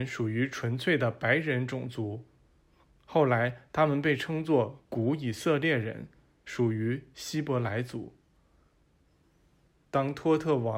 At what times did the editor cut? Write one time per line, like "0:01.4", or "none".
none